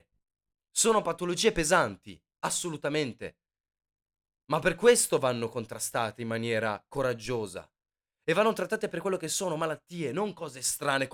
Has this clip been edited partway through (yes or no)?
no